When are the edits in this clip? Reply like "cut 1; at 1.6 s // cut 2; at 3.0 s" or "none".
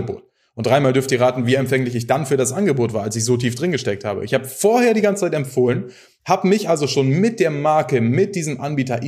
none